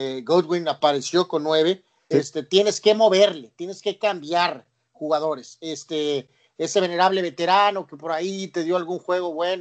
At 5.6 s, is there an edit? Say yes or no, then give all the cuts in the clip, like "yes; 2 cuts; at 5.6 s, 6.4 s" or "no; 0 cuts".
no; 1 cut; at 2.1 s